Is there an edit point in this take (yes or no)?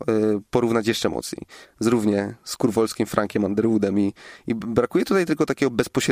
yes